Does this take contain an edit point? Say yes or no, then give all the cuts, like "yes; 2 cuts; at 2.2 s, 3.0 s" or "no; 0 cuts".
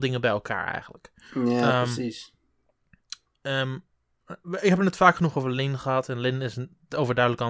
no; 0 cuts